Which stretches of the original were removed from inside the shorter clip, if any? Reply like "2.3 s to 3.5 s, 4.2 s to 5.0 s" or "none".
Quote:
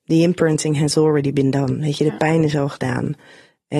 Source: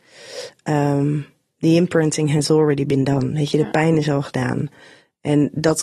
none